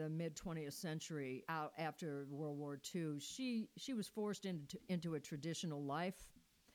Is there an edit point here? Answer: yes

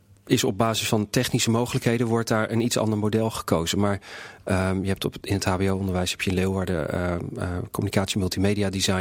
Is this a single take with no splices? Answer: yes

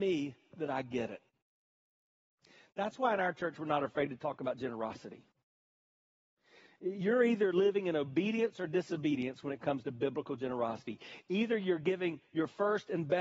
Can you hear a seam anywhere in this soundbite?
no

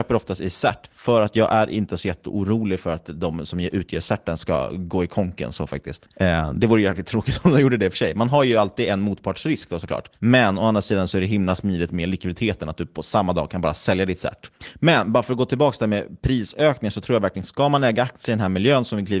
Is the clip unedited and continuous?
yes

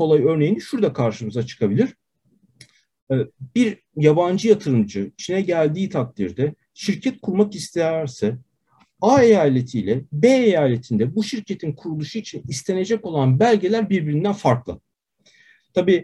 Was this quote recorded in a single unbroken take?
yes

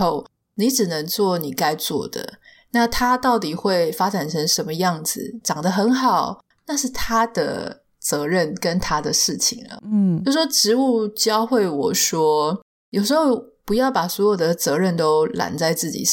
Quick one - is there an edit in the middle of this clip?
yes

